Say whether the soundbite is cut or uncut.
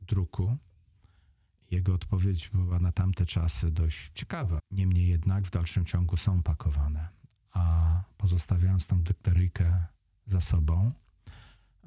cut